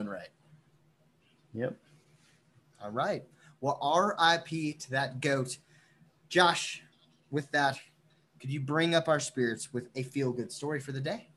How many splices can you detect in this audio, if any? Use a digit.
0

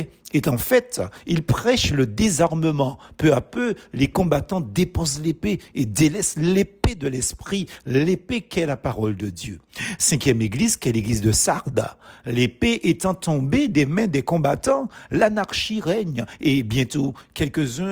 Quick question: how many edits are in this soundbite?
0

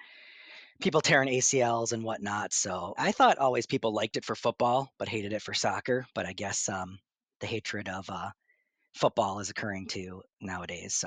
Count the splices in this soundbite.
1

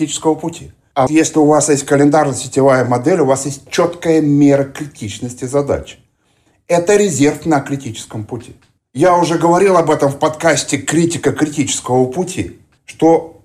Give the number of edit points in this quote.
2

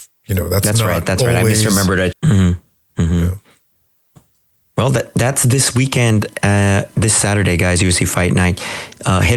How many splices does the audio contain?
1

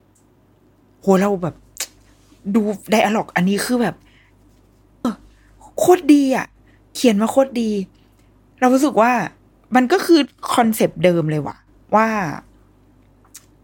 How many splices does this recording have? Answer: 1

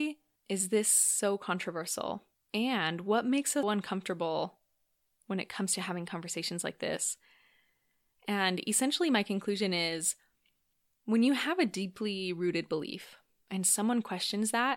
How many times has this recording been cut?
1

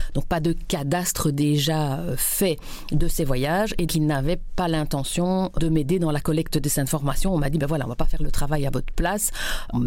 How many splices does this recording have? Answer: 1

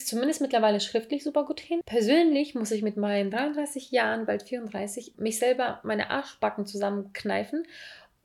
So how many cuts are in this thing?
2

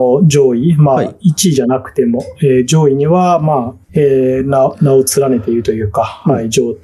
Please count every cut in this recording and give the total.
1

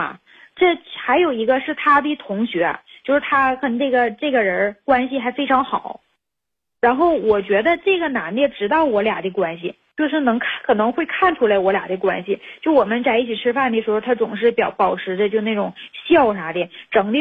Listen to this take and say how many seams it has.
1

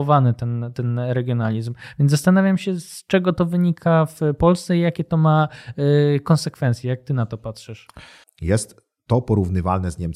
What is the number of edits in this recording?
1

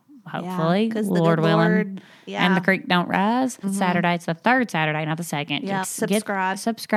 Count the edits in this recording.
2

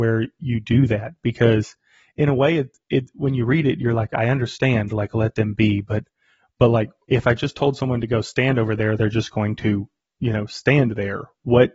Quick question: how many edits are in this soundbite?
0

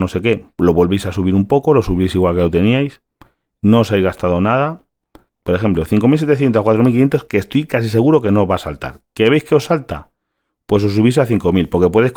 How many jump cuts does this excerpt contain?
1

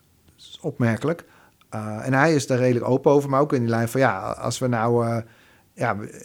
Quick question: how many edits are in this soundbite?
0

